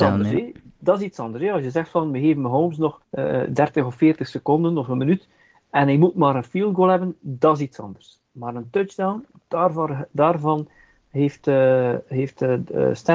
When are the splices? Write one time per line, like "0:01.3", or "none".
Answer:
0:03.0